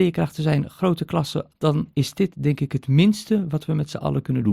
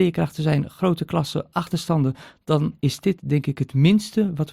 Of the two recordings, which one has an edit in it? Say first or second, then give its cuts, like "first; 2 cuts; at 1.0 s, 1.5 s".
first; 1 cut; at 1.5 s